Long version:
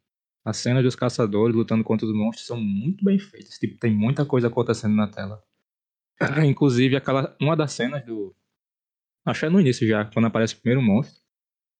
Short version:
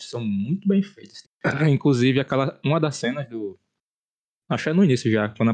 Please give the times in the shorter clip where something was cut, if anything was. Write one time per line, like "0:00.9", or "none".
0:01.2